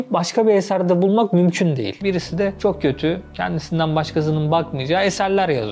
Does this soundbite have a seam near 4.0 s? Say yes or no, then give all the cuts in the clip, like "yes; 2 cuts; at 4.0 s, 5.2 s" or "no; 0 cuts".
no; 1 cut; at 2.0 s